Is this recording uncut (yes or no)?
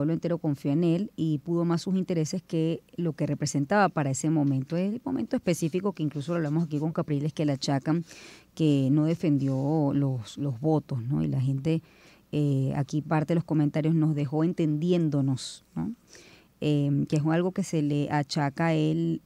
yes